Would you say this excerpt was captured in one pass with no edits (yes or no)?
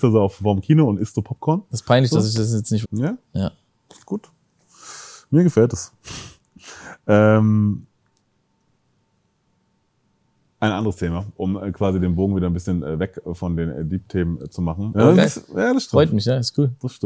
no